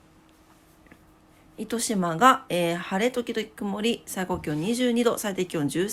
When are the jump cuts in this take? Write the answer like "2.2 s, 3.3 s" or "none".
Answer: none

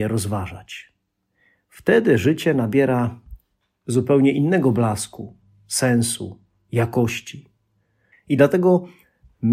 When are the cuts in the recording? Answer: 8.1 s

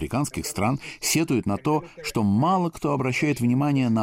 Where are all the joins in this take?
none

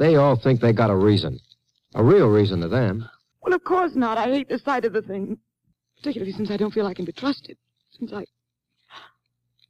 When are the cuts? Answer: 3.3 s

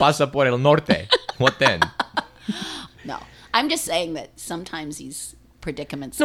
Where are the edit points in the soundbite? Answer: 2.9 s

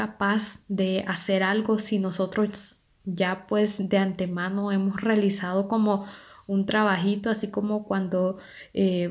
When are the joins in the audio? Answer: none

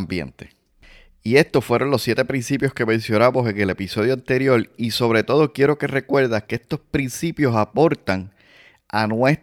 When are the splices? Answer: none

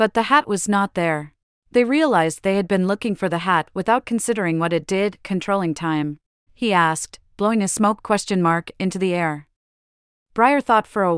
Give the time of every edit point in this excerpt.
1.5 s, 6.5 s

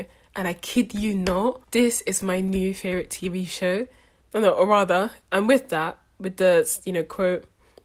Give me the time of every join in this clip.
1.6 s, 4.2 s

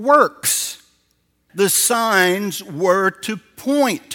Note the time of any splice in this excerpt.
1.5 s

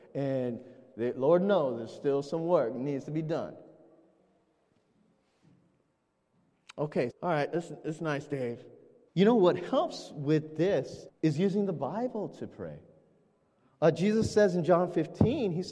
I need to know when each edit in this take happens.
7.1 s, 9.1 s, 11.1 s

